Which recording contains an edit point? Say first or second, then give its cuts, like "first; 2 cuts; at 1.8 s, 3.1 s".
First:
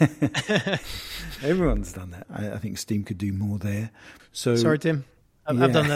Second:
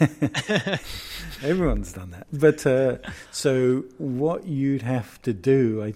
first; 2 cuts; at 2.2 s, 4.2 s